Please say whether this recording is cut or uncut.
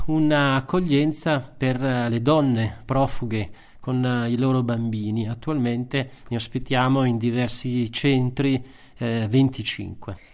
uncut